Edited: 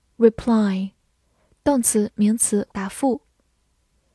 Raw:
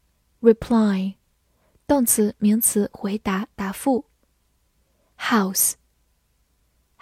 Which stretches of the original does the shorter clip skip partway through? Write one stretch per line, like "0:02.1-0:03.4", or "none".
0:02.9-0:03.5